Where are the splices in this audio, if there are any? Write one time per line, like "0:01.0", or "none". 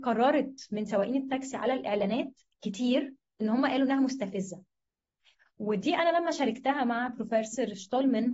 none